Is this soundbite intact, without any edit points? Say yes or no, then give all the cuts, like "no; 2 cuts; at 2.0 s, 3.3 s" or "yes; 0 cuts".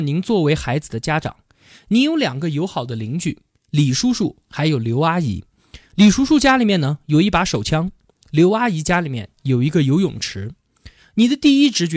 yes; 0 cuts